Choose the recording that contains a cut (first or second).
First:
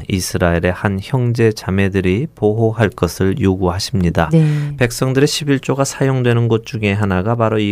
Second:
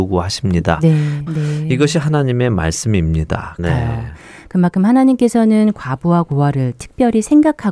second